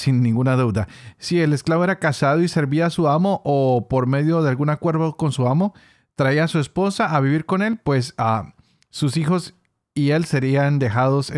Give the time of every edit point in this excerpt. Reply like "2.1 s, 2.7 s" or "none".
none